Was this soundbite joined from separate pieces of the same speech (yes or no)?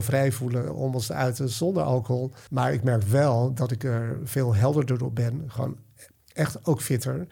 yes